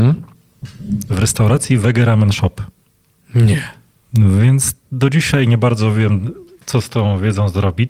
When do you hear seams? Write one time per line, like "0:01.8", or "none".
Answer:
none